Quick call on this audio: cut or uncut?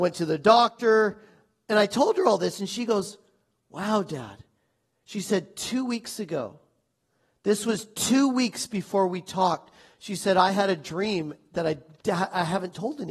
uncut